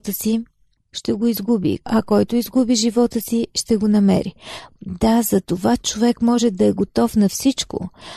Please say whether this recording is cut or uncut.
cut